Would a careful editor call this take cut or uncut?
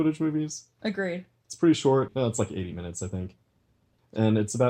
uncut